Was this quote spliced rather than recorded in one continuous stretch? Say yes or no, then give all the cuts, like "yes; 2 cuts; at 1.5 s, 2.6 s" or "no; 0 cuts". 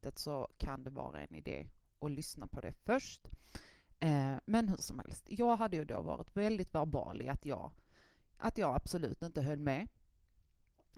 no; 0 cuts